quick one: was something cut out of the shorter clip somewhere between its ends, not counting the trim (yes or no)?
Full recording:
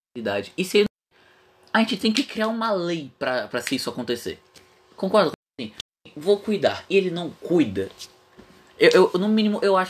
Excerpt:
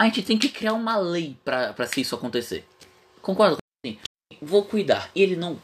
no